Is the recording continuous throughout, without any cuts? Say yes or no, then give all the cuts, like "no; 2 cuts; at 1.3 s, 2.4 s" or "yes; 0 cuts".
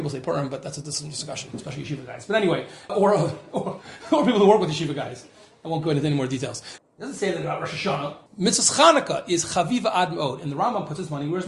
no; 3 cuts; at 2.9 s, 6.8 s, 8.3 s